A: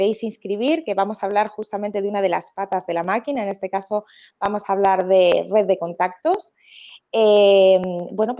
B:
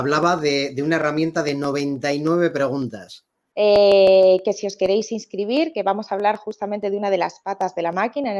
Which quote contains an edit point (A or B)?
B